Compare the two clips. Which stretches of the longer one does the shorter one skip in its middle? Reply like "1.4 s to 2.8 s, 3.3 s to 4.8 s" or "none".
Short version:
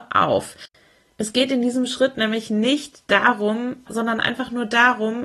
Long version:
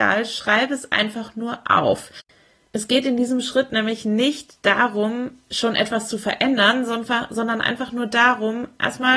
5.4 s to 7.3 s

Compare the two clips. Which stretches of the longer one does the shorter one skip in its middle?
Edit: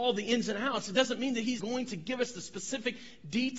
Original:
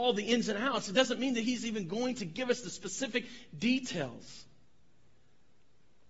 1.6 s to 1.9 s

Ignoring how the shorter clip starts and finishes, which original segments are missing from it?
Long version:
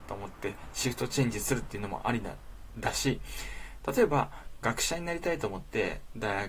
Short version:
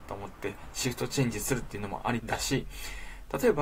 2.2 s to 2.7 s

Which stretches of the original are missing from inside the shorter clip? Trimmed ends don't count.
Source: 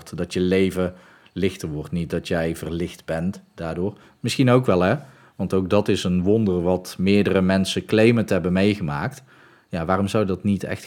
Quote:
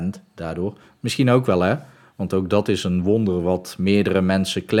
none

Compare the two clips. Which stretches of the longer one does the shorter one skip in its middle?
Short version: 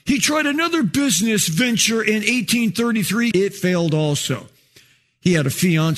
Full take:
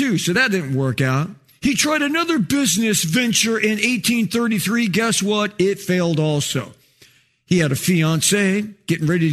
4.9 s to 5.6 s

